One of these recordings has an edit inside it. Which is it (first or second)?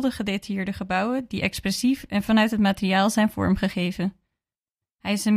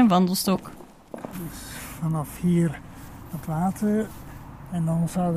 second